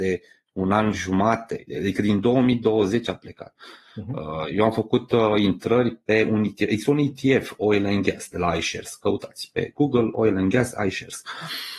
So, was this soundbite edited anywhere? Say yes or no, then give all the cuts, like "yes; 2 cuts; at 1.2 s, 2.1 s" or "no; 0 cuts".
no; 0 cuts